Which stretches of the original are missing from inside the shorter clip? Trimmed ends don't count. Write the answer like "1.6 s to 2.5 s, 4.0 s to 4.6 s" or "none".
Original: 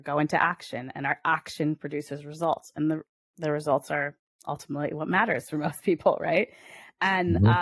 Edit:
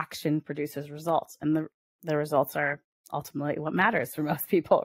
none